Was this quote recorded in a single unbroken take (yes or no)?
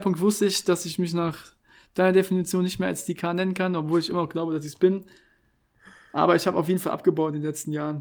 yes